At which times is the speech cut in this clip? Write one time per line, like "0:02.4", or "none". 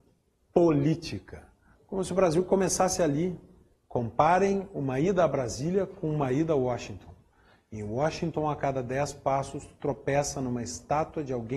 0:01.7
0:03.7